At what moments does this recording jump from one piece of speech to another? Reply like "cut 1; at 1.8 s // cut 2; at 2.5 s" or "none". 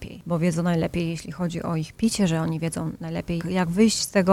cut 1; at 3.4 s